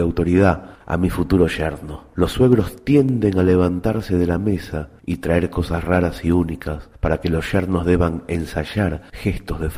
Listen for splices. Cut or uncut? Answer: uncut